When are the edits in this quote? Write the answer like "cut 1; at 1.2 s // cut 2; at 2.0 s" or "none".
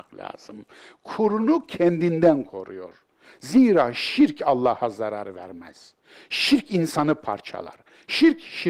none